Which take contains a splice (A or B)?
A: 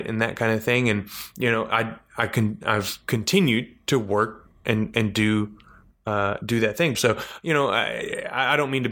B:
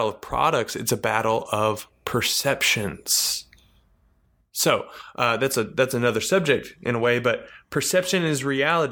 A